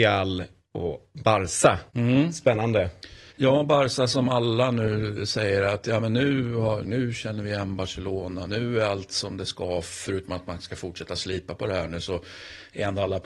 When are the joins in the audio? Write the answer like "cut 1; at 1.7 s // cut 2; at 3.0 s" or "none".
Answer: cut 1; at 1.9 s // cut 2; at 3.3 s // cut 3; at 6.8 s